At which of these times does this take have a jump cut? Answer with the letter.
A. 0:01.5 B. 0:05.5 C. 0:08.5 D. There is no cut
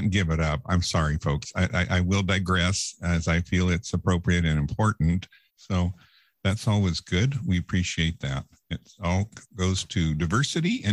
B